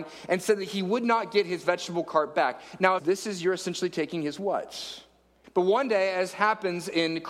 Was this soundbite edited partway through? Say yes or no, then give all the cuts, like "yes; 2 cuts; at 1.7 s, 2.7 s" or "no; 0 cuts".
yes; 2 cuts; at 3.0 s, 5.4 s